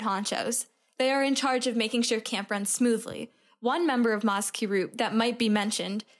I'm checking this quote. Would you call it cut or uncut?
uncut